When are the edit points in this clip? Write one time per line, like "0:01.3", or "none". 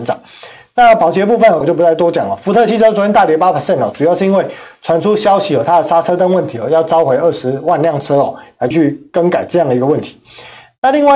0:01.6
0:08.7